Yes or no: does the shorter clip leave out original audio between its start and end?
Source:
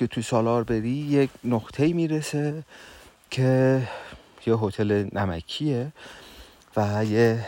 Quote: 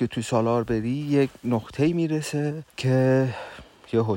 yes